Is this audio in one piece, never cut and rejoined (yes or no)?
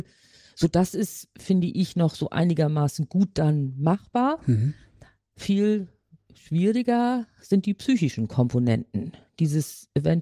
yes